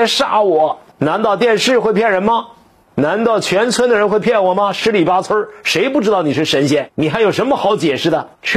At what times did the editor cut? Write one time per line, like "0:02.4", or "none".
0:00.9